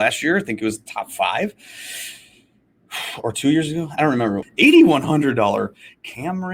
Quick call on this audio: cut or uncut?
cut